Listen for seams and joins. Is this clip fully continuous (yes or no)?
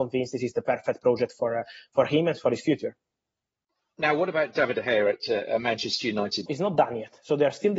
no